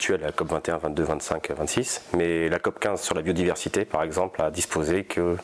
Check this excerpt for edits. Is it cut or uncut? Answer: uncut